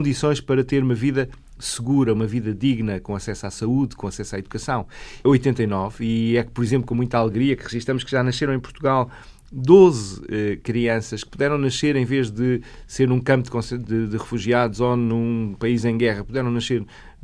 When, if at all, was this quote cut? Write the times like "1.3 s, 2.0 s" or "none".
5.2 s